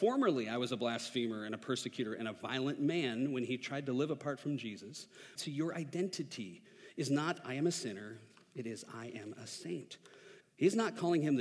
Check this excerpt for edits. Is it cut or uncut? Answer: cut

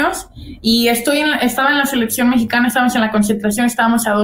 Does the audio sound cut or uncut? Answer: uncut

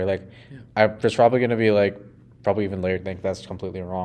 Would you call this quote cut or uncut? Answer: cut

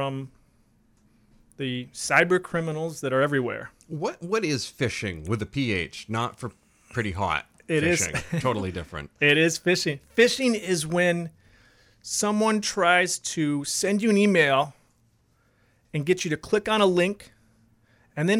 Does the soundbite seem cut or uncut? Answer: uncut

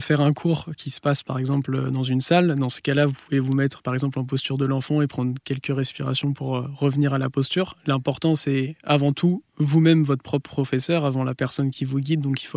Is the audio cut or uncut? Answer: uncut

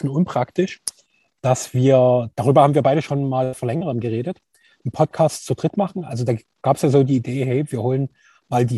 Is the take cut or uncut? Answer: uncut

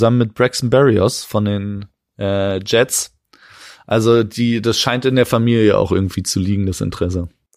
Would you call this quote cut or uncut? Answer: uncut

